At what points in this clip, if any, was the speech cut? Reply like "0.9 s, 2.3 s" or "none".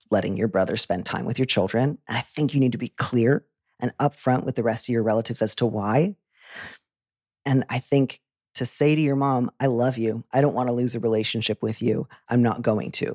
12.3 s